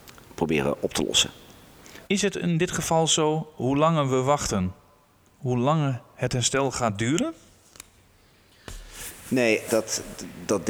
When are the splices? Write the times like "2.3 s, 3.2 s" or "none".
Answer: 2.1 s, 9.7 s

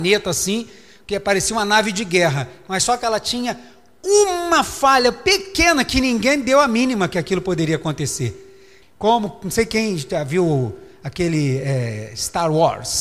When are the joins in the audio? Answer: 8.8 s

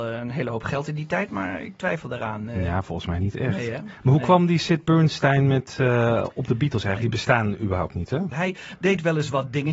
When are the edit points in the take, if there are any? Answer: 7.0 s, 8.3 s

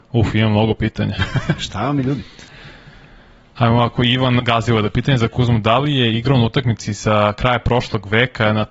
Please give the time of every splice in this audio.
4.4 s

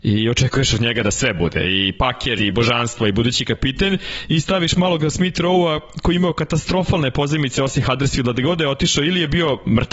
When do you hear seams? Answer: 2.4 s

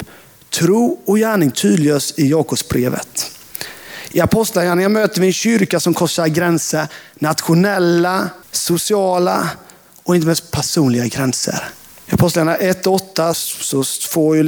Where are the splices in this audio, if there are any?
8.4 s, 11.9 s, 13.3 s

